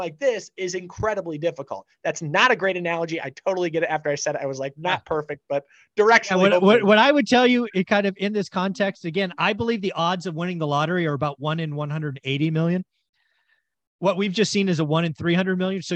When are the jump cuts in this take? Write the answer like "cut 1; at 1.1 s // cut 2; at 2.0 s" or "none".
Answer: none